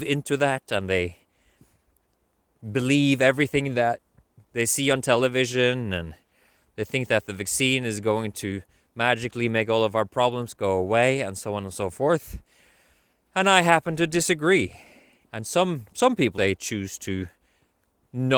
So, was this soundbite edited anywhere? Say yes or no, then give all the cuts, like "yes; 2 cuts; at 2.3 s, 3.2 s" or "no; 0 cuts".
yes; 2 cuts; at 15.2 s, 16.3 s